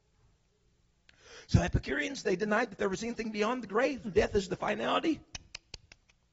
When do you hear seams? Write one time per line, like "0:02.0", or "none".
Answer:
0:04.0